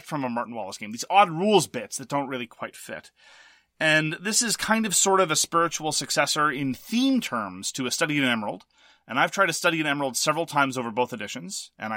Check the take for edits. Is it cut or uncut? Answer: uncut